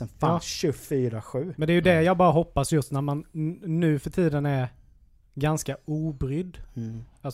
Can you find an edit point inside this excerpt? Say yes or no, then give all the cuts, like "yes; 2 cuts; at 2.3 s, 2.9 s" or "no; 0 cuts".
no; 0 cuts